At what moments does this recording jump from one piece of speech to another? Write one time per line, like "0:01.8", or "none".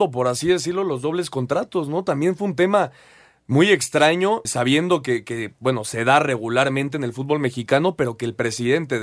0:04.5